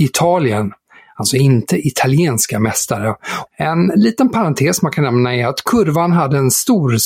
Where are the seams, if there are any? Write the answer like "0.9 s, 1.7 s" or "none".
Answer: 3.5 s